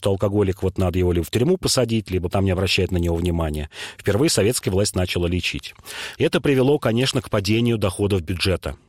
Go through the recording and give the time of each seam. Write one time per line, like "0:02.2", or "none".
0:02.3
0:06.2